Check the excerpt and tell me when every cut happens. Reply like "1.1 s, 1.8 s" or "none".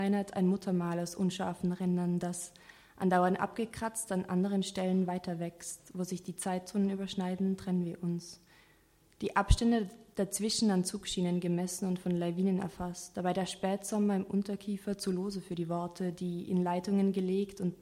none